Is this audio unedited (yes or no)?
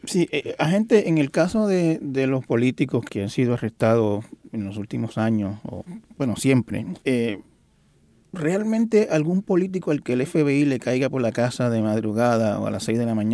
no